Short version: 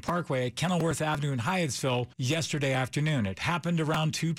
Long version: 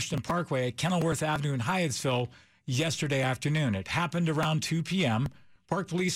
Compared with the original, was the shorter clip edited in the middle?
yes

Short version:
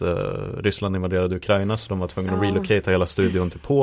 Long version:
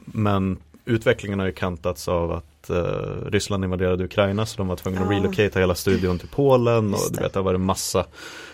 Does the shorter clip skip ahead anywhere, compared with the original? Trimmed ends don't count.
no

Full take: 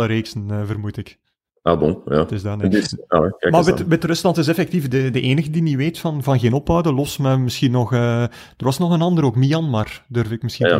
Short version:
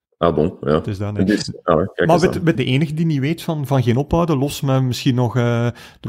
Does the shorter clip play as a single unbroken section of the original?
no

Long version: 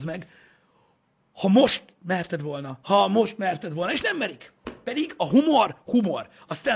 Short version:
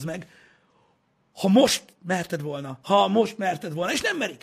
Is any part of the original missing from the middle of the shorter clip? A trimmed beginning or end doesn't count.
no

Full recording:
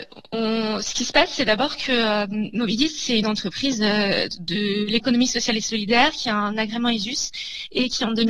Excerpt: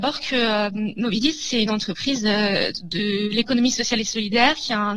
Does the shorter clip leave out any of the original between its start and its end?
no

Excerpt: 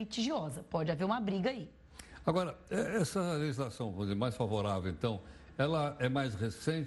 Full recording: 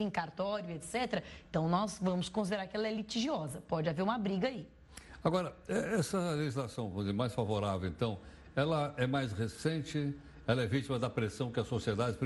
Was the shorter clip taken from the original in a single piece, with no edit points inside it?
yes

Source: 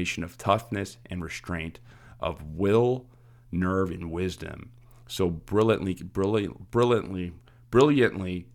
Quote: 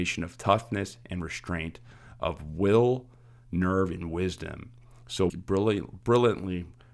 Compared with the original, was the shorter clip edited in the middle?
yes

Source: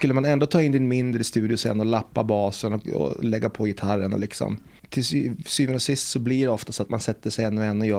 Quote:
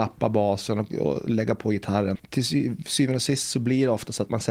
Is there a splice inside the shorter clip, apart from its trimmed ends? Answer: yes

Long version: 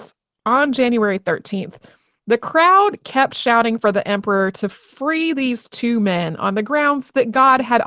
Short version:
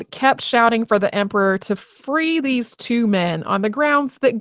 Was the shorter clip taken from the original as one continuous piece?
yes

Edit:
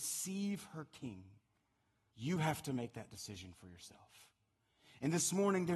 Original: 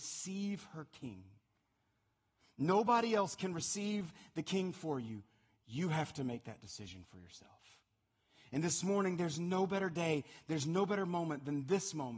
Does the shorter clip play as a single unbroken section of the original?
no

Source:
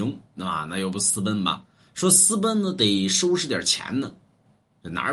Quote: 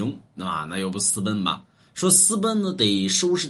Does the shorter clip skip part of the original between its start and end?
no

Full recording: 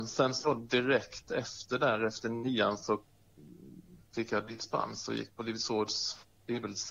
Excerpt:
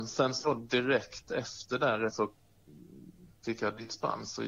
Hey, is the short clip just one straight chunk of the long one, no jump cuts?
no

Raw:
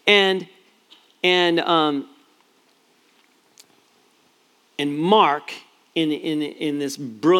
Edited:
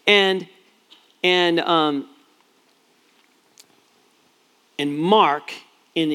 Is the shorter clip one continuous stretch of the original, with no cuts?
yes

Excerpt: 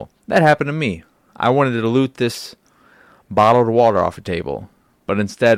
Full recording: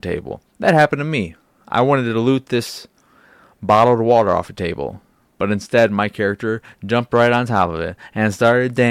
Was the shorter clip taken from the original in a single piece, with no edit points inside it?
yes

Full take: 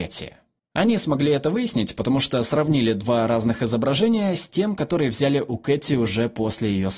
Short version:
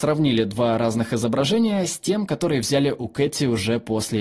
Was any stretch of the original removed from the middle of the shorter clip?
no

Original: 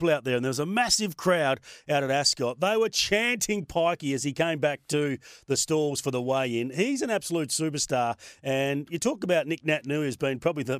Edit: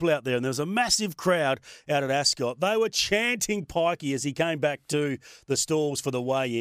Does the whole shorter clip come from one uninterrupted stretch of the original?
yes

